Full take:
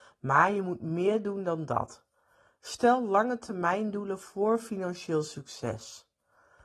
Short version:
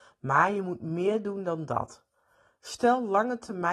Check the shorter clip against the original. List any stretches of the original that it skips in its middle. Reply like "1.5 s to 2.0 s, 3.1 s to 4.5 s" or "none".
none